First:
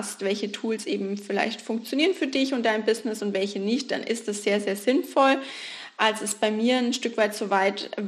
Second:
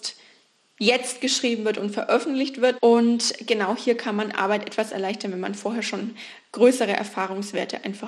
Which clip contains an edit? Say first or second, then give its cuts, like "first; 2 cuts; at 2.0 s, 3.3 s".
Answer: second; 1 cut; at 2.8 s